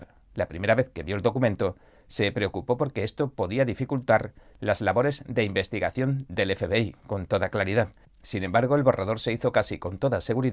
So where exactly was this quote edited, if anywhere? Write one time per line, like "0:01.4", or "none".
0:08.0